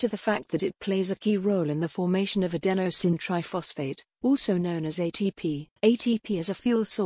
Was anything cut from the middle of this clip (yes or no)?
yes